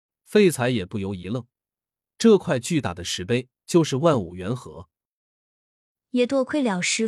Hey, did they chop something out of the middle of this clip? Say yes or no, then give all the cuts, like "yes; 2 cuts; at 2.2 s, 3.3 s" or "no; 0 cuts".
yes; 1 cut; at 3.6 s